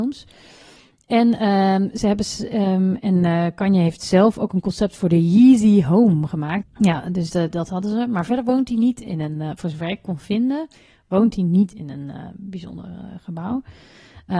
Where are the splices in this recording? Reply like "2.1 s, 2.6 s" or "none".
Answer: 6.6 s